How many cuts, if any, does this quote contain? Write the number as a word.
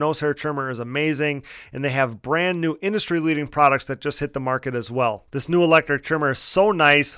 one